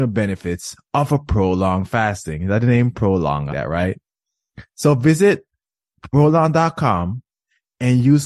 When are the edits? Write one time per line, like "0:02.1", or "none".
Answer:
0:03.5